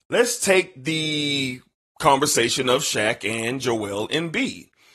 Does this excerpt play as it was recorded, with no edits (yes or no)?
yes